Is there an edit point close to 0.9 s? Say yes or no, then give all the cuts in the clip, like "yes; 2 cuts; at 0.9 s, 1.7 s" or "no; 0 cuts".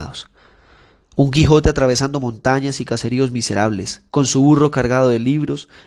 no; 1 cut; at 4.1 s